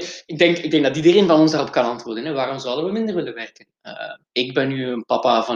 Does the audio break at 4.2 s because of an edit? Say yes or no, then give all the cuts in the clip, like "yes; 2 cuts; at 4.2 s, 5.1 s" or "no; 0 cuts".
yes; 1 cut; at 4.2 s